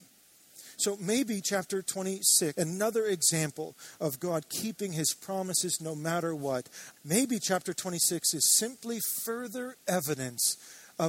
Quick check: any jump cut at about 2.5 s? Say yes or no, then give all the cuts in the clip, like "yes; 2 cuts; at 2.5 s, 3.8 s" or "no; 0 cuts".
yes; 2 cuts; at 2.5 s, 7.0 s